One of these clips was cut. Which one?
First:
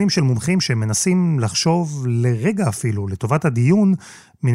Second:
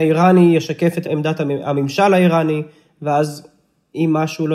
second; 1 cut; at 1.0 s

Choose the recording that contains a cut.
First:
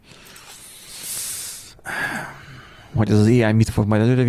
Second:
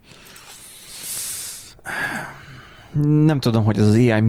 first; 1 cut; at 3.0 s

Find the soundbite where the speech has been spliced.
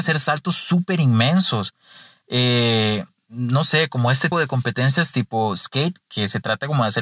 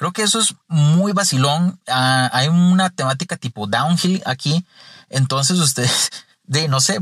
first; 2 cuts; at 4.3 s, 6.0 s

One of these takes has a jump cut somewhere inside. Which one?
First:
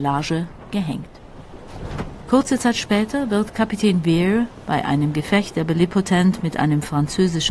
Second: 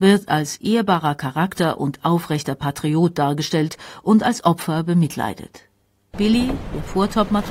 second; 1 cut; at 6.1 s

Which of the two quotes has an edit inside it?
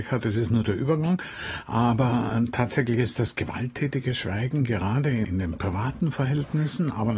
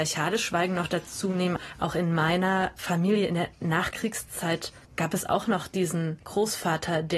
second; 1 cut; at 4.8 s

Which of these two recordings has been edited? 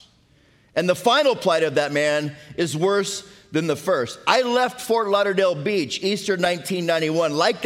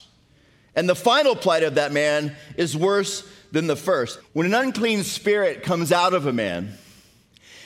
second; 1 cut; at 4.2 s

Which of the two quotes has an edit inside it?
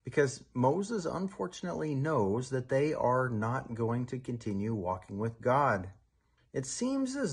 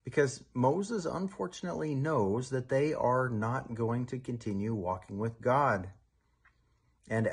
first; 1 cut; at 6.4 s

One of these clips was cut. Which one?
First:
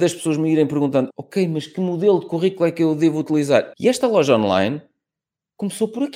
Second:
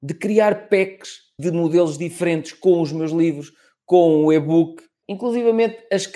first; 1 cut; at 3.7 s

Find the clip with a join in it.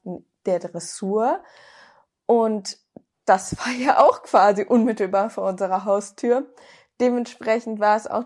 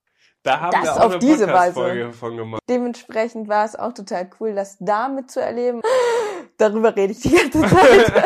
second; 3 cuts; at 2.6 s, 5.8 s, 7.2 s

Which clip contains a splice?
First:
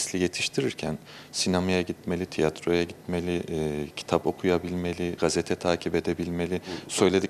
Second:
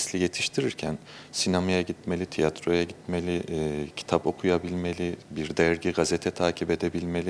first; 1 cut; at 5.2 s

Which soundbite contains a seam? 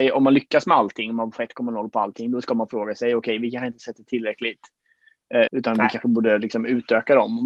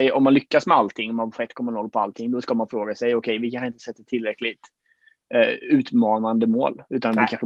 first; 1 cut; at 5.5 s

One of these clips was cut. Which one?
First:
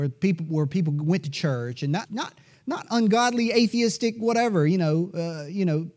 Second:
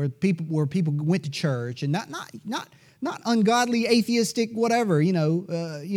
first; 1 cut; at 2.1 s

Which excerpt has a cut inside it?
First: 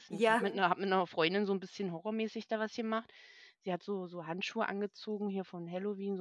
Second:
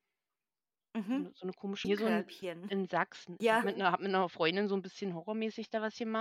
second; 2 cuts; at 1.8 s, 3.4 s

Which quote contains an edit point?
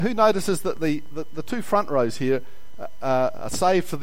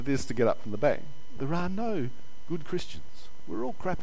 second; 1 cut; at 1.4 s

